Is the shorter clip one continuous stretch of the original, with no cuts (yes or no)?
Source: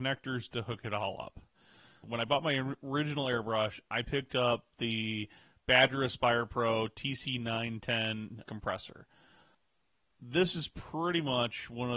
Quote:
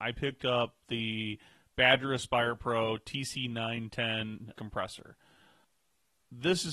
yes